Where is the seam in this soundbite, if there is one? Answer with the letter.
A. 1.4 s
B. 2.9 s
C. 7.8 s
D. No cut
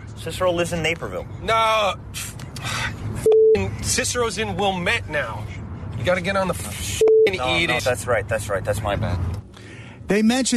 C